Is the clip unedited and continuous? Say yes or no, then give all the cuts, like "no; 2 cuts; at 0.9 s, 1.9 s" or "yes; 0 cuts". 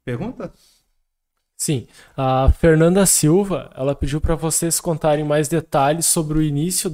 yes; 0 cuts